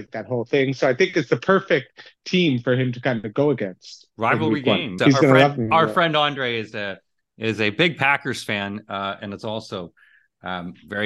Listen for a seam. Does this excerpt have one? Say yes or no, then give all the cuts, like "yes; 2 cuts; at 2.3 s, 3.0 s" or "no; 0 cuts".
yes; 1 cut; at 5.0 s